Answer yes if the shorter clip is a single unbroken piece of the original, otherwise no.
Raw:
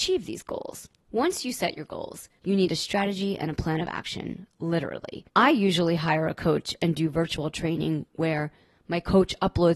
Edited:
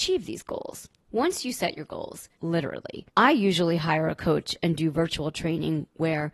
no